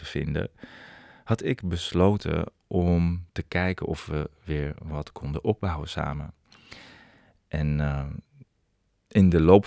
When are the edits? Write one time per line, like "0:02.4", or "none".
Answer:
0:03.3